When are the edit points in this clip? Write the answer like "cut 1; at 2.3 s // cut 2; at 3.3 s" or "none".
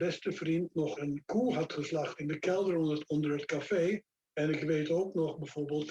cut 1; at 1.0 s // cut 2; at 4.2 s